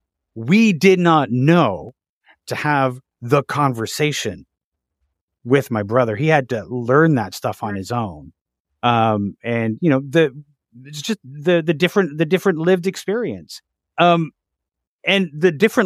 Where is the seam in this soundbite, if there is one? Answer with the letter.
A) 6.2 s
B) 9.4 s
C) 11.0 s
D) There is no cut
D